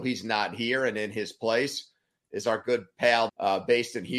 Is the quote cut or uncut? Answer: cut